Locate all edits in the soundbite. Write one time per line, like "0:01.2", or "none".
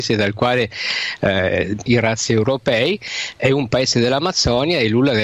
0:01.9